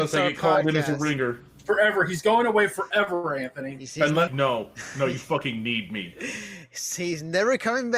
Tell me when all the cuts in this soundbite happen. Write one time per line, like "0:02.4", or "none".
0:04.3